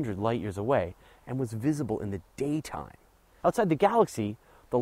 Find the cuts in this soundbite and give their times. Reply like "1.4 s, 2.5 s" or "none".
3.4 s